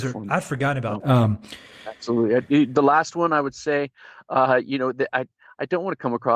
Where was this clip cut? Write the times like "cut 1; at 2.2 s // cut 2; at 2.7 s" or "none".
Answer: cut 1; at 1.0 s